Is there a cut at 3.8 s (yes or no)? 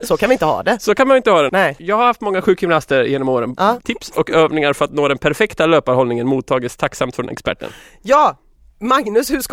yes